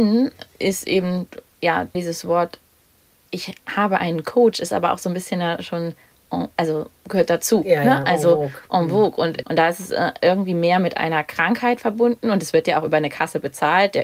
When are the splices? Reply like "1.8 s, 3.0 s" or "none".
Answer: 1.9 s, 9.4 s